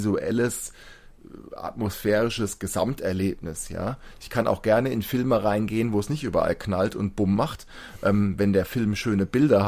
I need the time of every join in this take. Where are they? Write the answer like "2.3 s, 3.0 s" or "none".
none